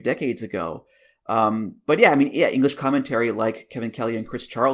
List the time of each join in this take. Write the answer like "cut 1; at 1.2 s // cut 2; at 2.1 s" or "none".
none